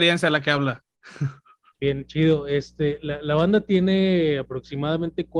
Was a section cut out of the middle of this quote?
yes; 1 cut; at 1.8 s

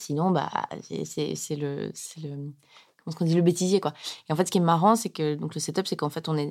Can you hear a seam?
no; 0 cuts

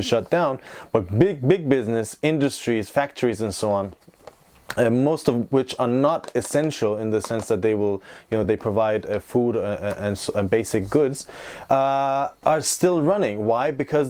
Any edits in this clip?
no; 0 cuts

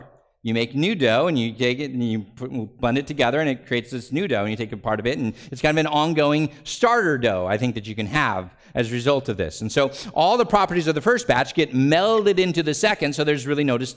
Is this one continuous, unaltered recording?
yes; 0 cuts

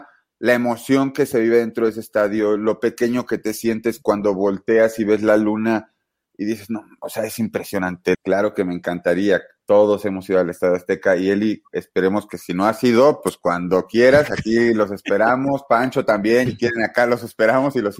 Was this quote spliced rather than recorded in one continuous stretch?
yes; 2 cuts; at 8.1 s, 16.5 s

